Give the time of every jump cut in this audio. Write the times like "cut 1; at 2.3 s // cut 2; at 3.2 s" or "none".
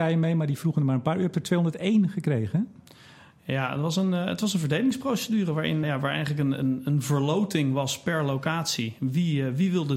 cut 1; at 5.8 s